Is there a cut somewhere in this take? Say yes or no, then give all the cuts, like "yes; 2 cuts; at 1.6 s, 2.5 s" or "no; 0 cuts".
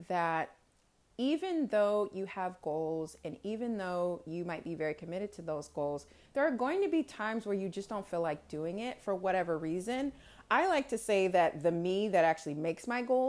no; 0 cuts